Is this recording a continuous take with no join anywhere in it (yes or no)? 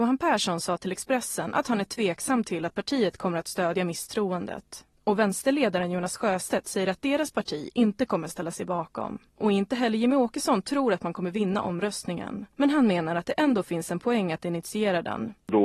yes